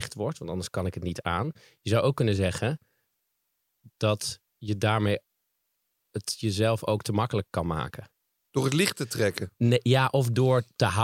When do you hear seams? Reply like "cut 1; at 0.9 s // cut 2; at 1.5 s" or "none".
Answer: cut 1; at 4.5 s